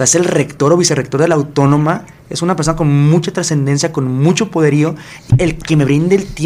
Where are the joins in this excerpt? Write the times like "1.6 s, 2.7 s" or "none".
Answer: 5.3 s